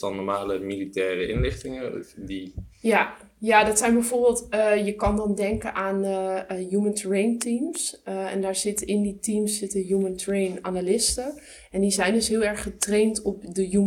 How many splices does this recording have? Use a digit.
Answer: 0